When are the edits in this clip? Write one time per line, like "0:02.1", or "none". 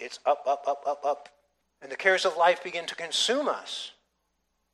0:01.6